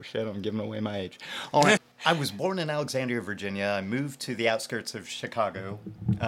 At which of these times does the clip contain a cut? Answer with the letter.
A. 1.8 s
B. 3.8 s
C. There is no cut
A